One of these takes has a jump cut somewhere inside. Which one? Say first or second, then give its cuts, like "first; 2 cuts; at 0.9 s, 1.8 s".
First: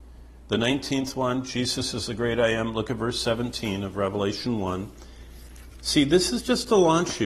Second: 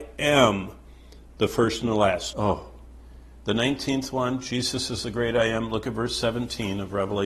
second; 1 cut; at 2.3 s